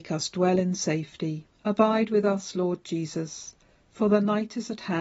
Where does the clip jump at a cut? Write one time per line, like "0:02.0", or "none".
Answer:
0:01.5

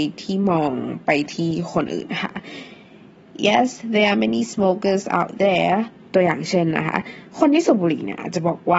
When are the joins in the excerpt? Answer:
0:06.0

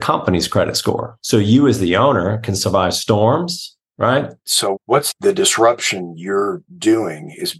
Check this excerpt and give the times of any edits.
0:01.2
0:04.5

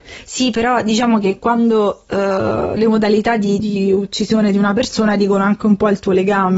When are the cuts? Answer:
0:03.6

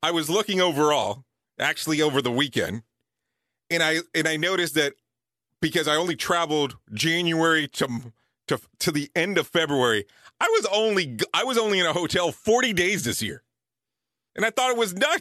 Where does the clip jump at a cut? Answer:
0:14.3

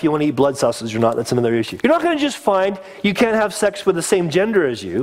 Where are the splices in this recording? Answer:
0:01.8

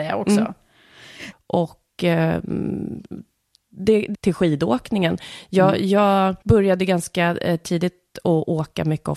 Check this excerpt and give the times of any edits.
0:01.3
0:04.1
0:06.4

